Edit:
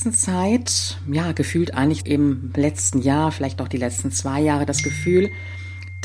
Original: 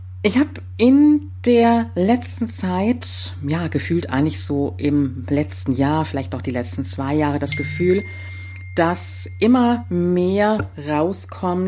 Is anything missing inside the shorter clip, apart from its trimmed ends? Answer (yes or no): yes